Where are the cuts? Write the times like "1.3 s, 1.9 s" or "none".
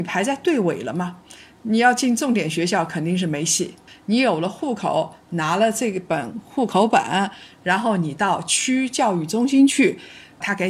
3.9 s